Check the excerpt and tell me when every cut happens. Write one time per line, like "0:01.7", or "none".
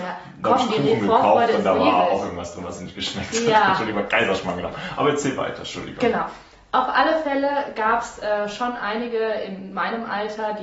none

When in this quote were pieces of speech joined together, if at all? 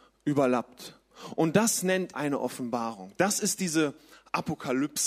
0:02.1

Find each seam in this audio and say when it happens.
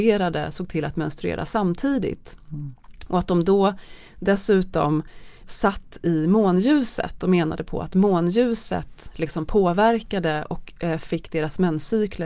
0:05.4

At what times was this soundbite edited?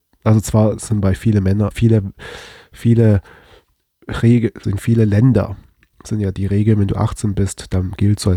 0:01.7
0:04.6

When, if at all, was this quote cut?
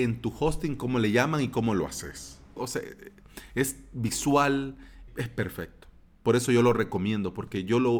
0:02.6
0:05.1

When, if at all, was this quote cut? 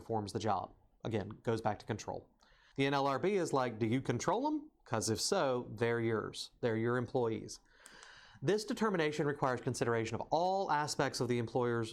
0:02.7

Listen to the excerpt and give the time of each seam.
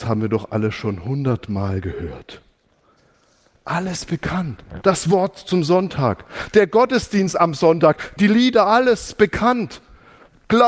0:08.2

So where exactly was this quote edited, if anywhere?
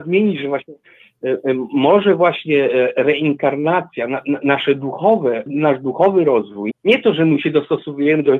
0:05.5
0:06.7

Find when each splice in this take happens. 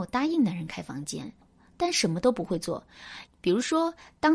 0:03.3

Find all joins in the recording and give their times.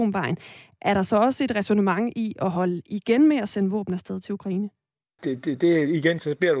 0:05.2

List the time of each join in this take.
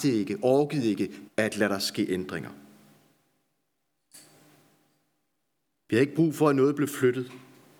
0:01.3

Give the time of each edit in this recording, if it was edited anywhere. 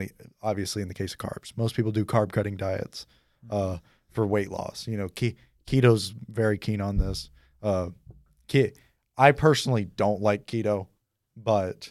none

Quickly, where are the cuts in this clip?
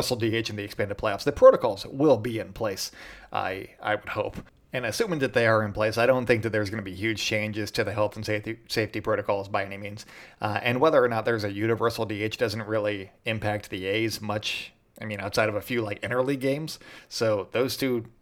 none

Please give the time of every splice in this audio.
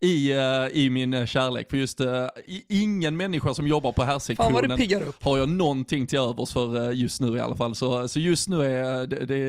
none

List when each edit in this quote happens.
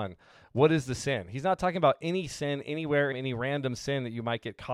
0:03.1

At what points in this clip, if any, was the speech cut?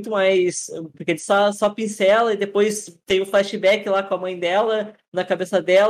0:00.9

